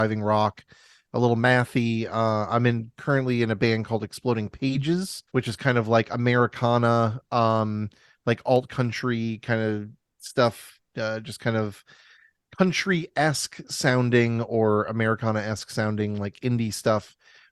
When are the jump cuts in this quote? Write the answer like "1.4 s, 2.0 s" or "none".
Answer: 5.3 s